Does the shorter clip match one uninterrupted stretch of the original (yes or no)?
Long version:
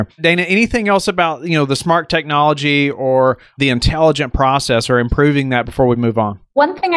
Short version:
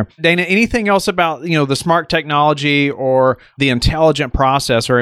yes